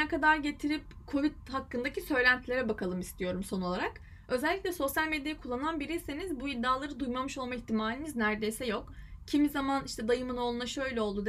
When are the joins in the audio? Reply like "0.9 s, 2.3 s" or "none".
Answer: none